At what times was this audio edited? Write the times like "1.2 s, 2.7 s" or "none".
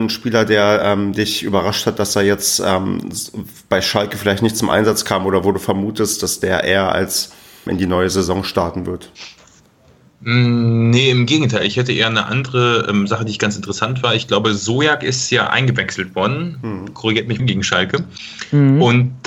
7.7 s, 17.4 s

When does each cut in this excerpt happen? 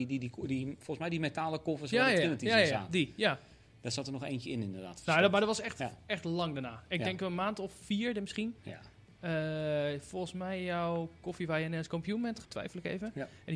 8.6 s, 12.4 s

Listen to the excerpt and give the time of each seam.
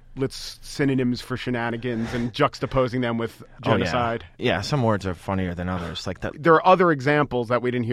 6.3 s

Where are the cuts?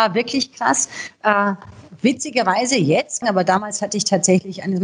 3.2 s

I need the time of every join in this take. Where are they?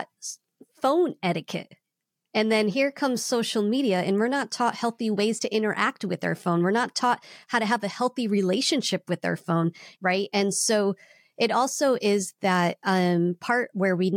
10.0 s

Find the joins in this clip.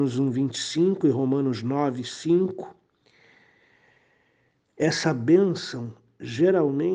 none

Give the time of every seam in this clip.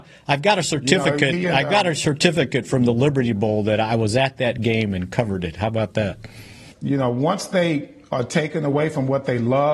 6.7 s

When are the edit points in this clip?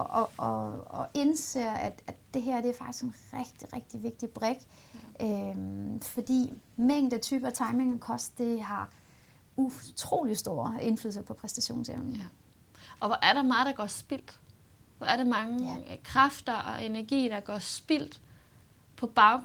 none

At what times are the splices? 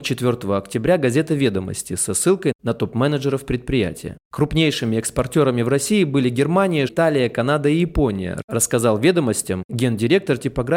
4.2 s, 6.9 s

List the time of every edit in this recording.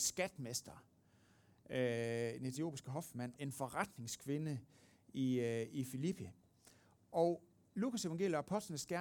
3.4 s

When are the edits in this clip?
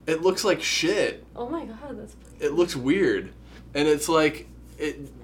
none

